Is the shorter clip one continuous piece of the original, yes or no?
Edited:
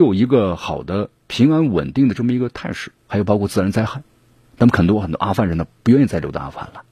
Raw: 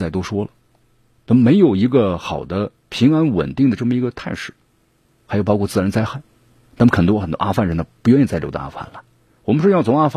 no